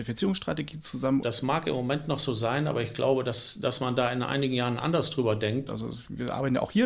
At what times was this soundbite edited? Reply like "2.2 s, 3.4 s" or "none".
1.2 s, 5.7 s